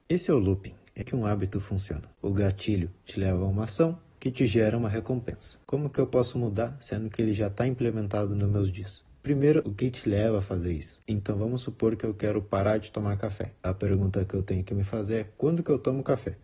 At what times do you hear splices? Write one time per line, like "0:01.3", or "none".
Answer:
0:01.0
0:05.6
0:09.6